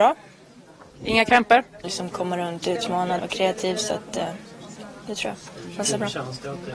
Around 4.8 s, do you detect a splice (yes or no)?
no